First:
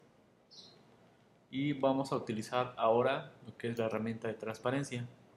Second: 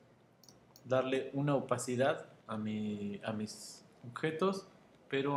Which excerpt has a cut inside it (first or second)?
second